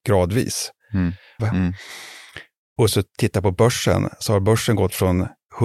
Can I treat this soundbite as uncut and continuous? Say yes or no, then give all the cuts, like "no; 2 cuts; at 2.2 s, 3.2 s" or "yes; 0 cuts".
no; 1 cut; at 1.4 s